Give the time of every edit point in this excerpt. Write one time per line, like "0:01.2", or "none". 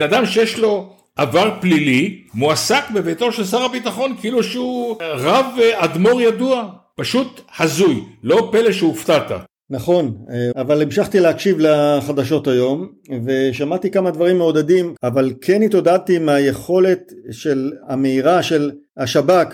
0:10.5
0:15.0